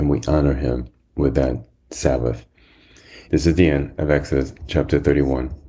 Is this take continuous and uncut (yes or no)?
no